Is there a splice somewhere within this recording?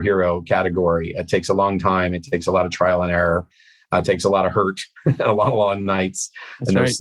no; 0 cuts

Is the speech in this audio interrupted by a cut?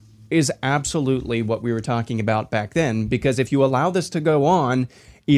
no; 0 cuts

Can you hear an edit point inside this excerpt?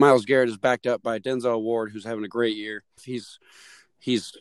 yes; 1 cut; at 3.0 s

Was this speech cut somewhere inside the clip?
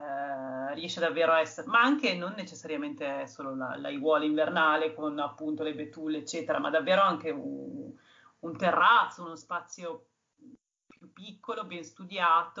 no; 0 cuts

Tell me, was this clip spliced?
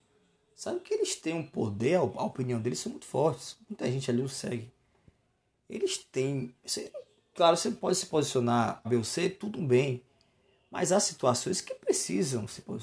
yes; 2 cuts; at 6.6 s, 8.8 s

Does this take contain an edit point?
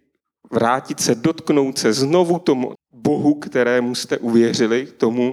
yes; 1 cut; at 2.8 s

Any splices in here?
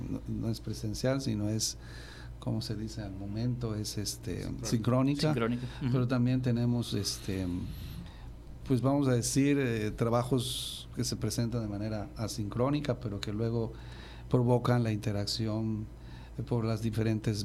no; 0 cuts

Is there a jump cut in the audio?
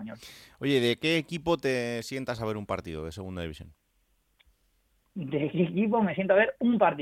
no; 0 cuts

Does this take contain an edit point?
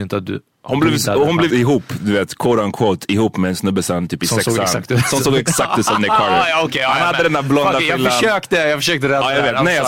yes; 1 cut; at 1.5 s

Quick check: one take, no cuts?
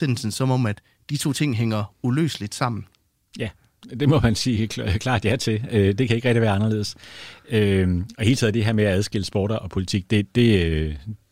yes; 0 cuts

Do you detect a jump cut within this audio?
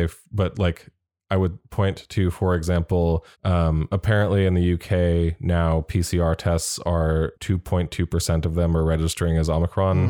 yes; 2 cuts; at 3.3 s, 7.3 s

